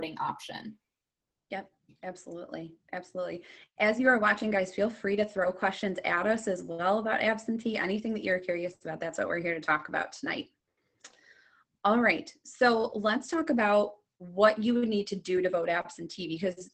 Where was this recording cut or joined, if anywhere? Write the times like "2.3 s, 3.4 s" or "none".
none